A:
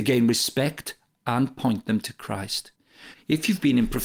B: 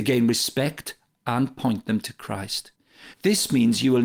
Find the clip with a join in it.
A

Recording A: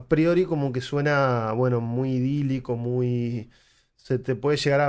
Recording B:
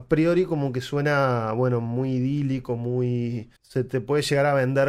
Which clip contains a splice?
B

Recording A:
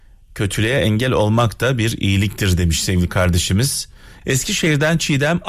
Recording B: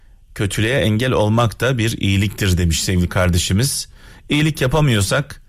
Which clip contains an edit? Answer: A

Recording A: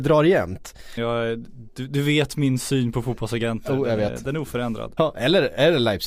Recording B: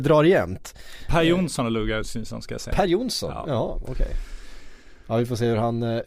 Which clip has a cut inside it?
A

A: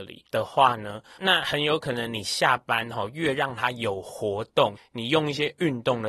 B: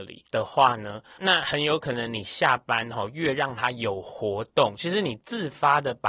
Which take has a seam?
A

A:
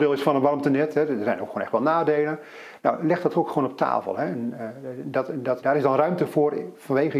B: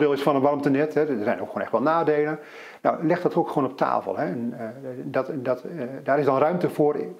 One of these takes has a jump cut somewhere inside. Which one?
A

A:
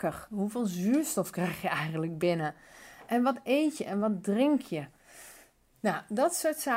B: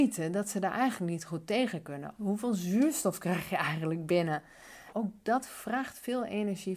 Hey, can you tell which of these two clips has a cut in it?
B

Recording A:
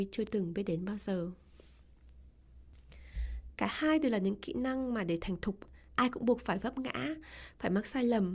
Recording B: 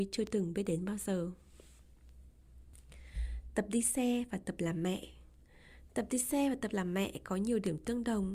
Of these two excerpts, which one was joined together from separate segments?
A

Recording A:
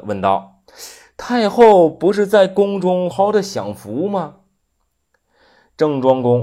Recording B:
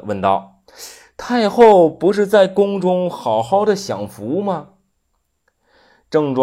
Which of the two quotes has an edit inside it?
A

